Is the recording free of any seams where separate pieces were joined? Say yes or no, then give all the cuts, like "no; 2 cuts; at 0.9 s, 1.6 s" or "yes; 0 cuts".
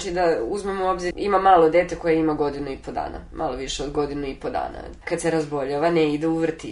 no; 2 cuts; at 1.1 s, 5.0 s